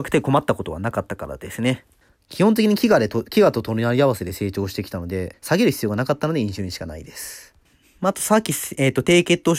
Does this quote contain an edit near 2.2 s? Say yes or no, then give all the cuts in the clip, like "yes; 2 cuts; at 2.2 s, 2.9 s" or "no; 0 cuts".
no; 1 cut; at 5.3 s